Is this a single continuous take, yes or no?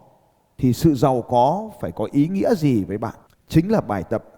yes